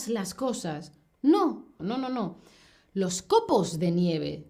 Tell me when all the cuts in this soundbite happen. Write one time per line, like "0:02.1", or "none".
0:01.8